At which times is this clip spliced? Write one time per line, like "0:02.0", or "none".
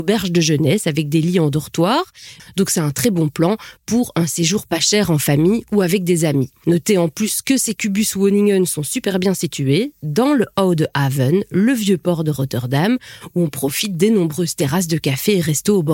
0:02.4